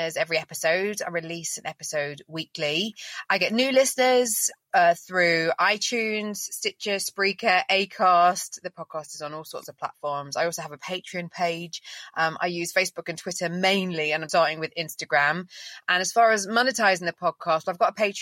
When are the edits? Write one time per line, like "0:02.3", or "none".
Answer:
0:14.3